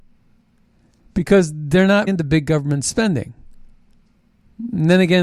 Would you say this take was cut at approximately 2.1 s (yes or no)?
yes